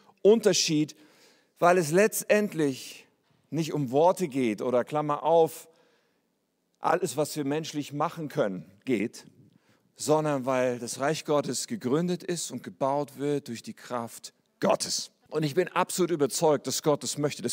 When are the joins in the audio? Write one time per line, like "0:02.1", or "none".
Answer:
0:15.3

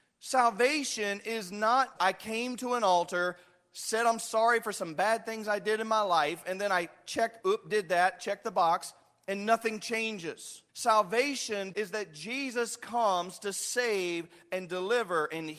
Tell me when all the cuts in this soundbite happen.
0:02.0
0:10.7
0:11.7

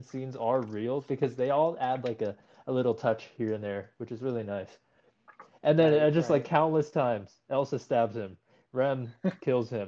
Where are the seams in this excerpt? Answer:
none

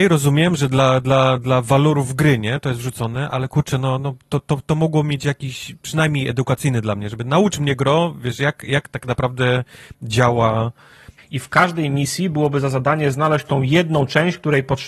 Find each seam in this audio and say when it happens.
0:11.2

